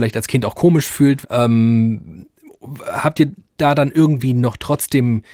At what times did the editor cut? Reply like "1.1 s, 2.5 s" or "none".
1.2 s